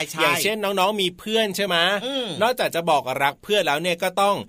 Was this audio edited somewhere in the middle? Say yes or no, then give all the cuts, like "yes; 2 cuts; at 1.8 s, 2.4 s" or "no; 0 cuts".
no; 0 cuts